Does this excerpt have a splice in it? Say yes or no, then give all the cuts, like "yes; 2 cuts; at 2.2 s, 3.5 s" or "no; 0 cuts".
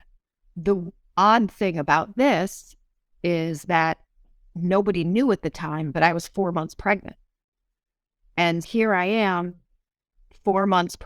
yes; 1 cut; at 8.6 s